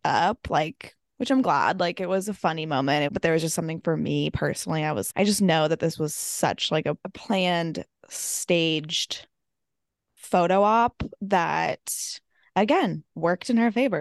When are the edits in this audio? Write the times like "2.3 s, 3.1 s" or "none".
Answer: 3.1 s, 5.1 s